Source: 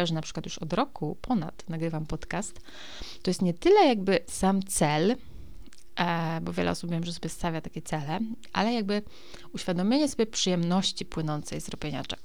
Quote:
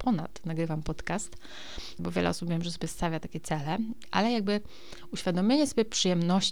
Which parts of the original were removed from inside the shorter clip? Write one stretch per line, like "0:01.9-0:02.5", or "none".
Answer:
0:03.2-0:06.4